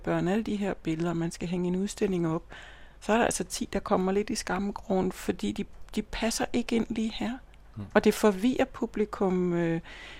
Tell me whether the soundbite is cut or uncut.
uncut